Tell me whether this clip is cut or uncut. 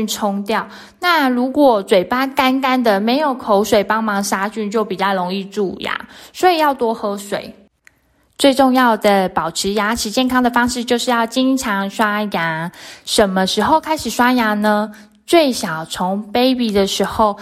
uncut